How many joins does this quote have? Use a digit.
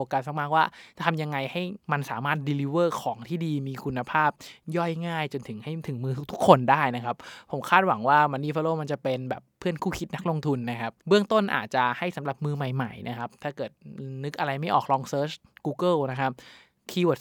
2